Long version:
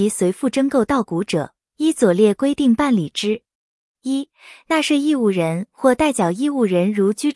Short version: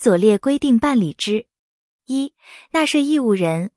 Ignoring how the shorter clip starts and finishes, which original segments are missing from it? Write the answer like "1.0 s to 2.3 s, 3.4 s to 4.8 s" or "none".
none